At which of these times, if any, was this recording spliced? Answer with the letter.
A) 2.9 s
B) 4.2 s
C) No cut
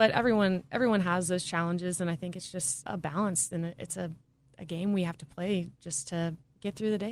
A